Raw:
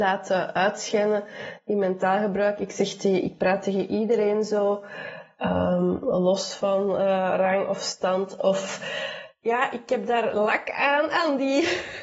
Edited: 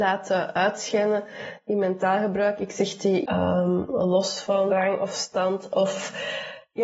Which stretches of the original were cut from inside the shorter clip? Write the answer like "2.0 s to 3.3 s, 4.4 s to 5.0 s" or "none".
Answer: 3.2 s to 5.4 s, 6.8 s to 7.4 s